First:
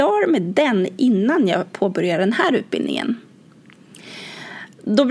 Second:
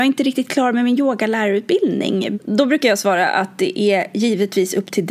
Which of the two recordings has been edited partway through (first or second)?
second